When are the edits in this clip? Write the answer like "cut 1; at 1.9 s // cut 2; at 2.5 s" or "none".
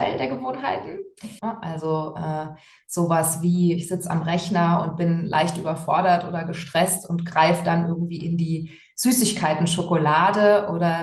cut 1; at 1.4 s